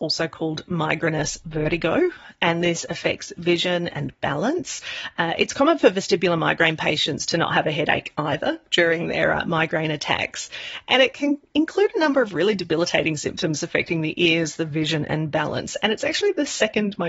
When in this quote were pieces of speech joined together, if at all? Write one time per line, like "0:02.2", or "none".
none